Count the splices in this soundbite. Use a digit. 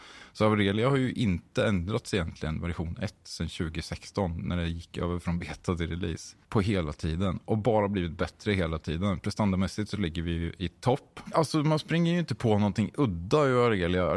2